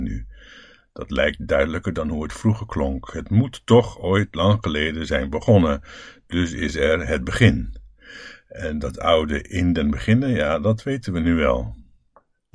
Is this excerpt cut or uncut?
uncut